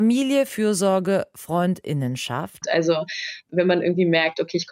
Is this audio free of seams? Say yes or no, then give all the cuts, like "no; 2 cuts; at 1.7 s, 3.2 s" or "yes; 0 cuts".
no; 1 cut; at 2.6 s